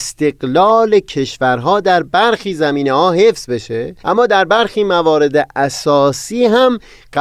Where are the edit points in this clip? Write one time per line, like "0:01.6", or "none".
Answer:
0:04.0